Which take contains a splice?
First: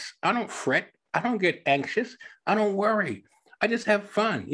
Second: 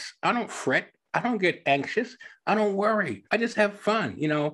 second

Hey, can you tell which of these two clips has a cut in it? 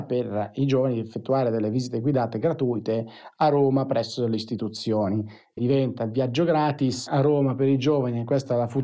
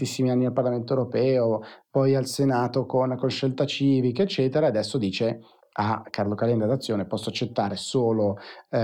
first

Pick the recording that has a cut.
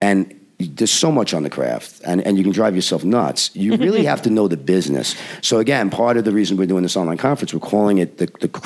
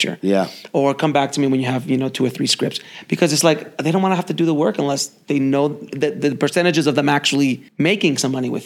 second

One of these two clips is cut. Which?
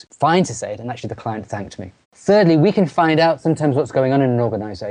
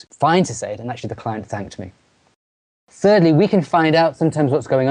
first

